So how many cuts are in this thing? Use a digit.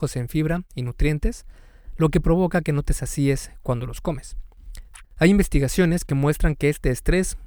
1